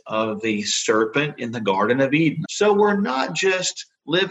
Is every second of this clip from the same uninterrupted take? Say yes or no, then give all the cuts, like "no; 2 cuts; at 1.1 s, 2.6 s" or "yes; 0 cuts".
no; 1 cut; at 2.4 s